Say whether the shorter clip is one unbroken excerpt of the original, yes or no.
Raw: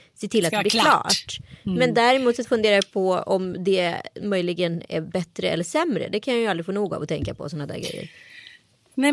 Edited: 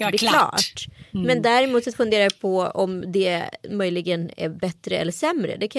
yes